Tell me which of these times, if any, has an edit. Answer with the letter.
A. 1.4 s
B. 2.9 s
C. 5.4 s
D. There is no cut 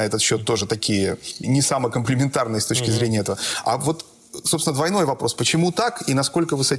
A